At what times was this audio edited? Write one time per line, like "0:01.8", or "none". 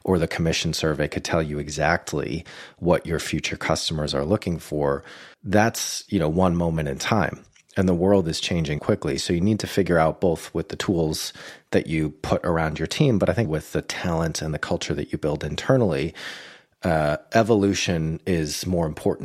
0:05.3
0:08.8
0:13.4